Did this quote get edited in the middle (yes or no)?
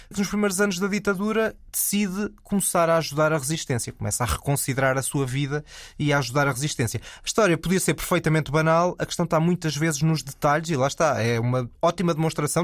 no